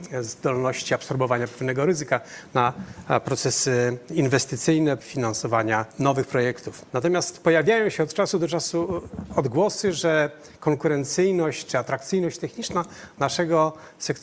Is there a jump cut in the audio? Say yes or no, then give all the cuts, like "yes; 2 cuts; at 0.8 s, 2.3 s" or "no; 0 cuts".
yes; 2 cuts; at 5.0 s, 6.9 s